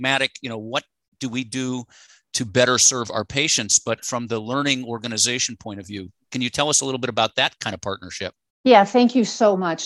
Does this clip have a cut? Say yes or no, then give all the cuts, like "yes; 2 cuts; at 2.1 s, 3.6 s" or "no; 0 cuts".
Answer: no; 0 cuts